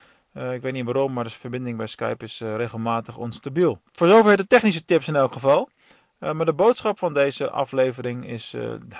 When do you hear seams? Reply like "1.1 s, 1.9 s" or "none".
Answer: 3.9 s